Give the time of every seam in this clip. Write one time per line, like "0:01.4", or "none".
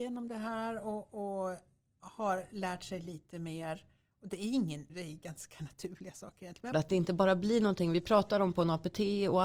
0:04.9
0:06.7